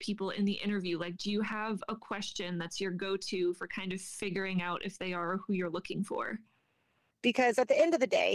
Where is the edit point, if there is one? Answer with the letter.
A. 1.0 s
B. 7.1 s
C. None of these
B